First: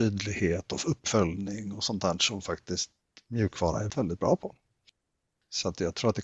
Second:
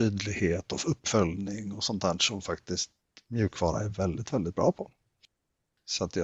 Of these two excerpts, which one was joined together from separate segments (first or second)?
first